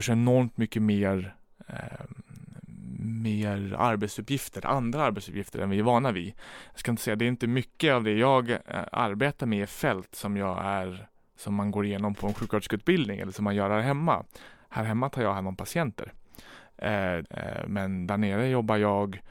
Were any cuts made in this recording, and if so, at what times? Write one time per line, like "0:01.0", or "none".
0:17.2